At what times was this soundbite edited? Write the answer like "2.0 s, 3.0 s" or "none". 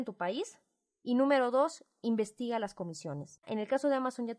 3.4 s